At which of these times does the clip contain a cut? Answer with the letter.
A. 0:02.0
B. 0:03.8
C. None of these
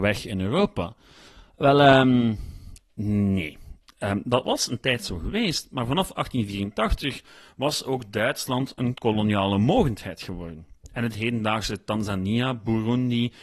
C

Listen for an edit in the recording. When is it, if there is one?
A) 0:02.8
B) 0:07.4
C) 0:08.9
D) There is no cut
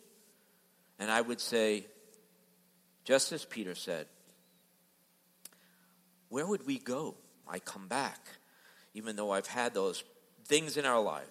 B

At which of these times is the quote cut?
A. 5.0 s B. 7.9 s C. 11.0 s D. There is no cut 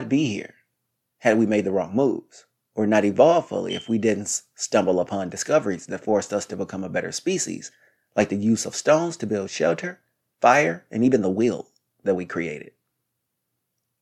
D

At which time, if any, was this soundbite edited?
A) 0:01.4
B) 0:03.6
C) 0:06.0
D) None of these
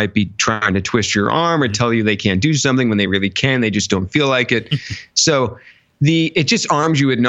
D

